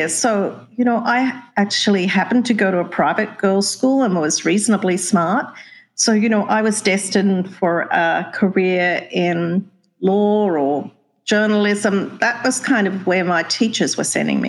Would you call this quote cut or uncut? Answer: uncut